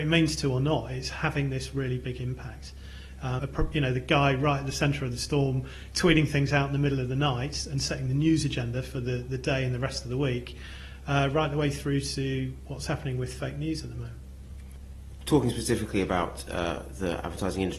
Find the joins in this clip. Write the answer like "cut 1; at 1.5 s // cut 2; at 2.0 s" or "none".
cut 1; at 3.4 s